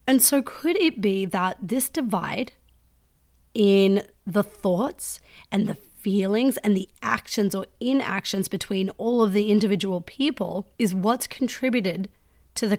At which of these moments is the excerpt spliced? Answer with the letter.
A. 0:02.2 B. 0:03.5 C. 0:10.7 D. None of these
C